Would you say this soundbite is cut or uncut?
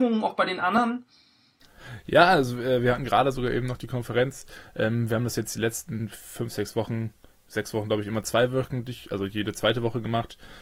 uncut